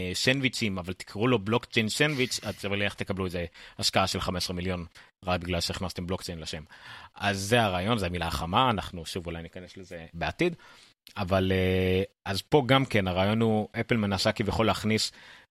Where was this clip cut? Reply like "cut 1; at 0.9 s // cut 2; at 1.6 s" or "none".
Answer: cut 1; at 10.1 s